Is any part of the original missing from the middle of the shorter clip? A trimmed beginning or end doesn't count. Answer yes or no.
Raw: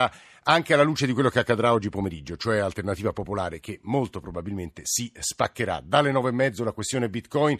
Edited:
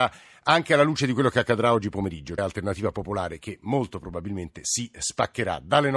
yes